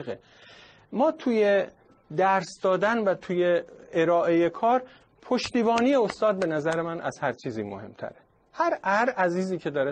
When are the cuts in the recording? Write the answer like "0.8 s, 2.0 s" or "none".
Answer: none